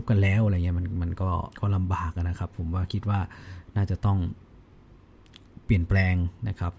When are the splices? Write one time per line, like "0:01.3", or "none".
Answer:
0:01.5